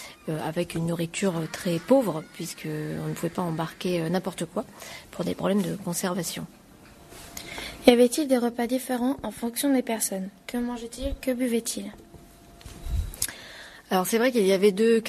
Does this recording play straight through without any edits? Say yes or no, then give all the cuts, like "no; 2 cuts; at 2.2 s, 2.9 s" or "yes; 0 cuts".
yes; 0 cuts